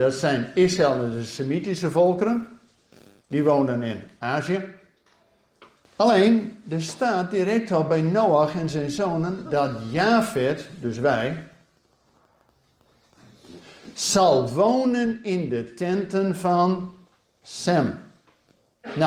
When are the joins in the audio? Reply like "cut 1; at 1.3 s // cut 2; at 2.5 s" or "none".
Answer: cut 1; at 5.8 s

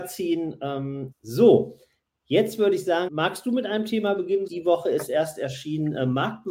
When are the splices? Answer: cut 1; at 1.1 s // cut 2; at 3.1 s // cut 3; at 4.5 s

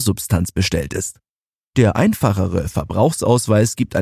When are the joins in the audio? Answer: none

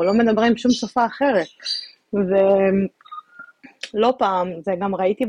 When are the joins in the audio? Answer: none

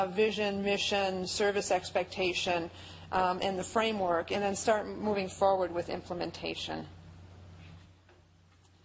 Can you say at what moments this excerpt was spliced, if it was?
cut 1; at 3.4 s

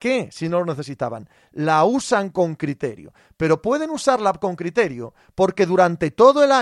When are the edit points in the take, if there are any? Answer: none

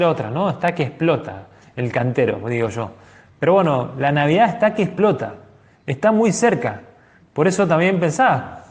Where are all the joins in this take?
none

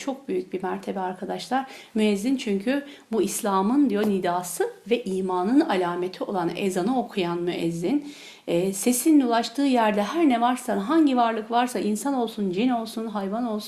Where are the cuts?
none

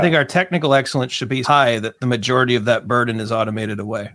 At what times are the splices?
cut 1; at 1.4 s

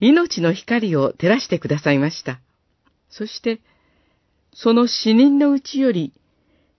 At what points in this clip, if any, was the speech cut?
cut 1; at 2.9 s

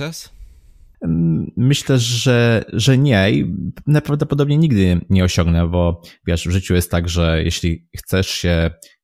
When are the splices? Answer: none

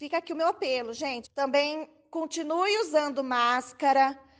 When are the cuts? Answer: cut 1; at 1.2 s

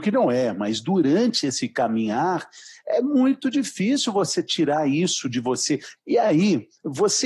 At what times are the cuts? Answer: cut 1; at 6.0 s

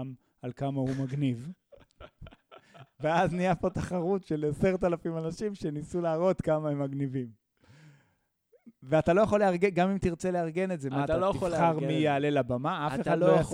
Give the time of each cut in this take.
none

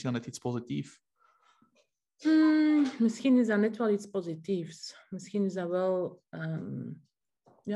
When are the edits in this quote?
none

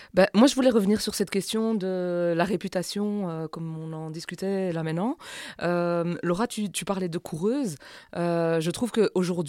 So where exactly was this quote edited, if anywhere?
none

